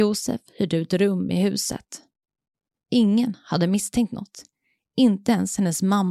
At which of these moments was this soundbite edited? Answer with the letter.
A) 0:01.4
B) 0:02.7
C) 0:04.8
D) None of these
B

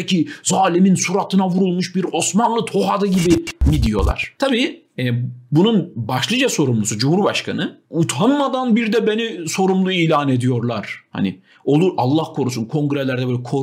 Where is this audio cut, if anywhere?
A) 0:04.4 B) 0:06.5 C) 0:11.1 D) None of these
D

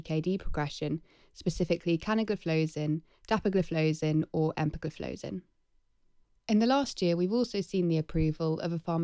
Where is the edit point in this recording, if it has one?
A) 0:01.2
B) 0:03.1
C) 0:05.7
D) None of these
D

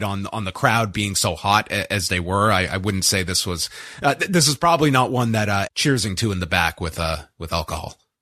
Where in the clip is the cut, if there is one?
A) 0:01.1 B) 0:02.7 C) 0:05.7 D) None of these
C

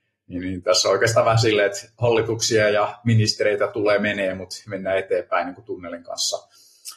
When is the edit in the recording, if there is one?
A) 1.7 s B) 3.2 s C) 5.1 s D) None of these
D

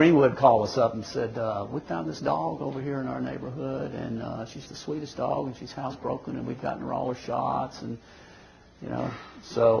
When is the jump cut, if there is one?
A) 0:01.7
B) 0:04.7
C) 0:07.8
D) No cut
B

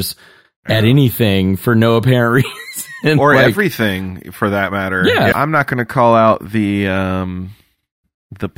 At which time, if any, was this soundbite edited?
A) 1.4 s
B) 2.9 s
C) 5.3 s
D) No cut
C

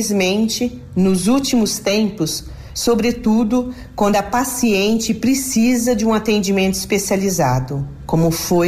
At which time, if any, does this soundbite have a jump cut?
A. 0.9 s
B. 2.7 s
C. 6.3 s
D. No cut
B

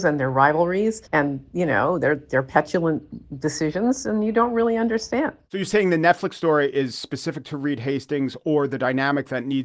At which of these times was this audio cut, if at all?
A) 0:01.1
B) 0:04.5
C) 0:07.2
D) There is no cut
A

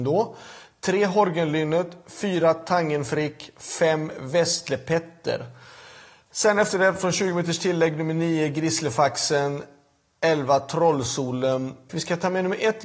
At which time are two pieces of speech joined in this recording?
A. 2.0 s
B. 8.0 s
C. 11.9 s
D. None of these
C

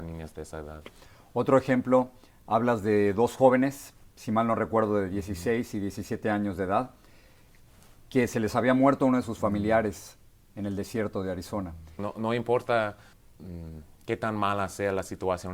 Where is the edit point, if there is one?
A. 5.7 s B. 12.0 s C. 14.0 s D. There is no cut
B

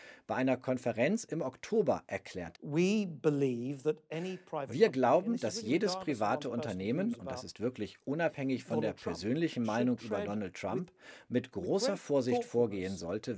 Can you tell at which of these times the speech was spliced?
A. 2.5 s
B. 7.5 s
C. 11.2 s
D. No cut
A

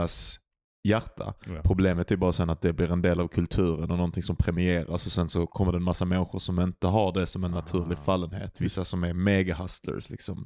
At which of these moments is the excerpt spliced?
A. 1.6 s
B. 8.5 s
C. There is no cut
B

